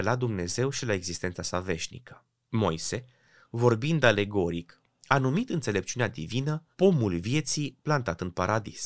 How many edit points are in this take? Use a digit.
3